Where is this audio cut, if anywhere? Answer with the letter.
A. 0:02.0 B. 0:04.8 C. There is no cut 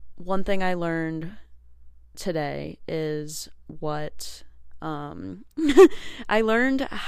C